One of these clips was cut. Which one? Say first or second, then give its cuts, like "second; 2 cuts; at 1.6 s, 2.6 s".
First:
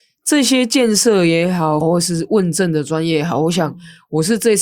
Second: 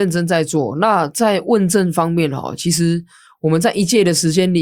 first; 1 cut; at 1.8 s